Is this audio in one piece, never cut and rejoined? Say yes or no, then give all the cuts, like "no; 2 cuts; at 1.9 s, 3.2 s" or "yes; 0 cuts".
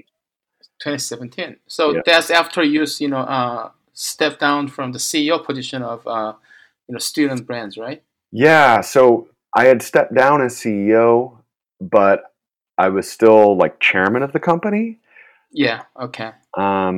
yes; 0 cuts